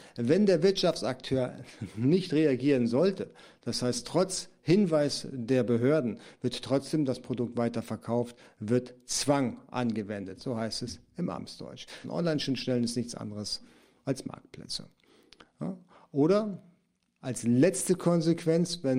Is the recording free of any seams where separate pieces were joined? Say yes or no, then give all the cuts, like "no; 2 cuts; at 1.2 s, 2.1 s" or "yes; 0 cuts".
no; 1 cut; at 12.0 s